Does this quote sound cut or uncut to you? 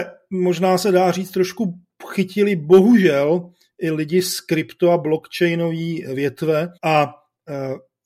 cut